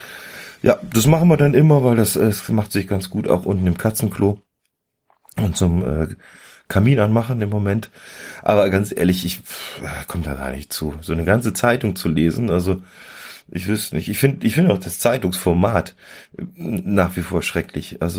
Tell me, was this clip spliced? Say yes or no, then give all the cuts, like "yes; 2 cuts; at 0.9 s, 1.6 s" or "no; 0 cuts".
no; 0 cuts